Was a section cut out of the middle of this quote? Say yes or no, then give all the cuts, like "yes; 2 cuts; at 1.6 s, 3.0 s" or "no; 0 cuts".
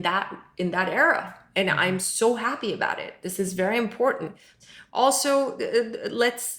yes; 1 cut; at 4.6 s